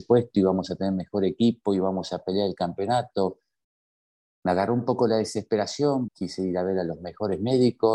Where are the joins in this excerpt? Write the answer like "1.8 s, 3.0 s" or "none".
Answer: 4.2 s, 6.1 s